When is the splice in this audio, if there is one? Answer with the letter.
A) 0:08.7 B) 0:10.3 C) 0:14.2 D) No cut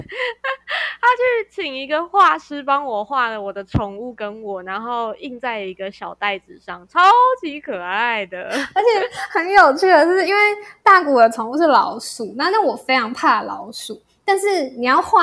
D